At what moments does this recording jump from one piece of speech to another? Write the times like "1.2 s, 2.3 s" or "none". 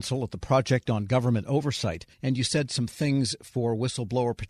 2.1 s